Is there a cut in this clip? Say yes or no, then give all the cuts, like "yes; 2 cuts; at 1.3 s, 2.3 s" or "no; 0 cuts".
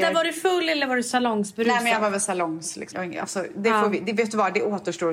yes; 1 cut; at 2.9 s